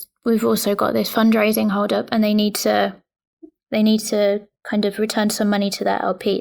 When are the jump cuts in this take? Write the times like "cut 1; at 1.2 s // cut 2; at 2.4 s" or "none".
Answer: none